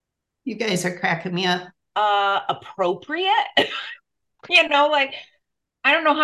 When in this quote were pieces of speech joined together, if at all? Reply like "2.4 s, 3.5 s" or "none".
1.8 s

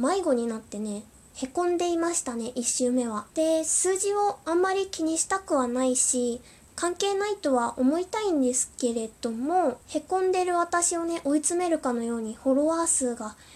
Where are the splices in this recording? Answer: 3.3 s, 9.8 s

